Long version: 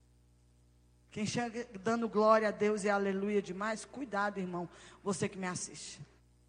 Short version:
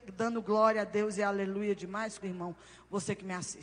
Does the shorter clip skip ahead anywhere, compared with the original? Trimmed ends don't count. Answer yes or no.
yes